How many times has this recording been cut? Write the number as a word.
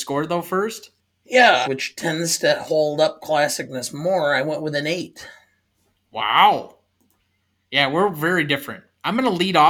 one